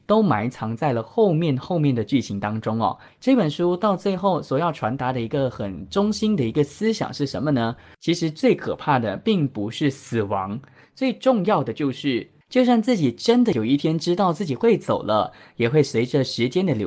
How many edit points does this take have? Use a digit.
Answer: 1